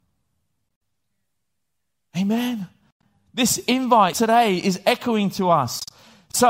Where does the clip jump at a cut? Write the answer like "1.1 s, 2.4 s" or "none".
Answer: 4.1 s